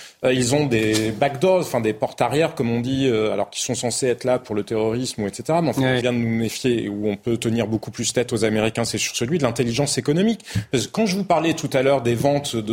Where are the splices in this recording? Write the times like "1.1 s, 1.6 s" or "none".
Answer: 6.0 s